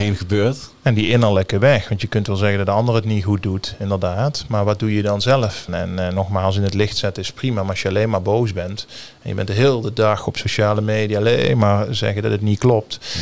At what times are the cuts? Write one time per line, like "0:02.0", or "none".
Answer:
0:05.7